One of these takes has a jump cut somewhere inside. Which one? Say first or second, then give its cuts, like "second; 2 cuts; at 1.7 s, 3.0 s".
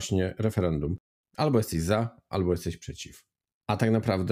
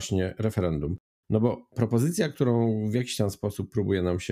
first; 1 cut; at 1.2 s